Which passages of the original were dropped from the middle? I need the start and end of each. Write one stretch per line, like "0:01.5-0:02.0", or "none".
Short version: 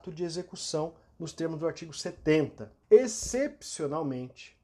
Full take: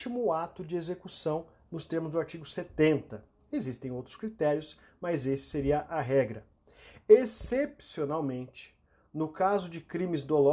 0:03.4-0:07.0

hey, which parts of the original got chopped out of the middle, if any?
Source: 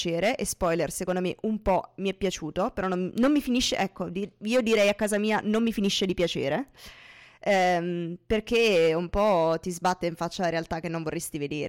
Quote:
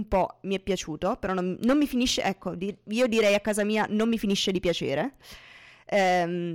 none

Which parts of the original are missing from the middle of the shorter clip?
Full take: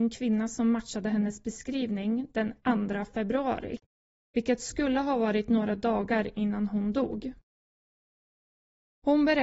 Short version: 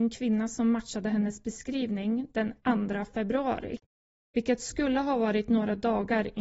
none

